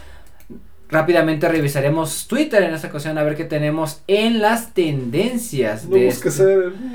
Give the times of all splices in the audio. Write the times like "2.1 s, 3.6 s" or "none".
none